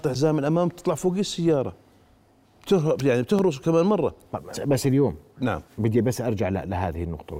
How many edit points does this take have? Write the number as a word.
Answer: two